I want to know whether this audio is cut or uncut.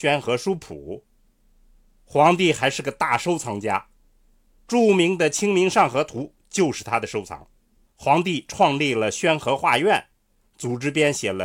cut